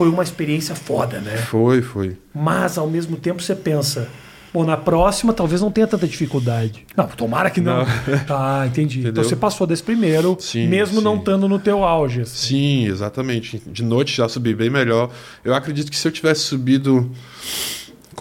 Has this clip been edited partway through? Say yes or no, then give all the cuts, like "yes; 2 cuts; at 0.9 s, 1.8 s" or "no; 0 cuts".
yes; 2 cuts; at 6.9 s, 8.3 s